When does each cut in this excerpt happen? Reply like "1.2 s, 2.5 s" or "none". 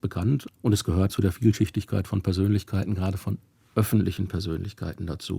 1.1 s